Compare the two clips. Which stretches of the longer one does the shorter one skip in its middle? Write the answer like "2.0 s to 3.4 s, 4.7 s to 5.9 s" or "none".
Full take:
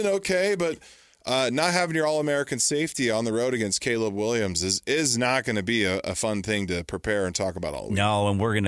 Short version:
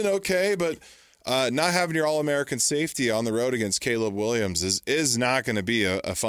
none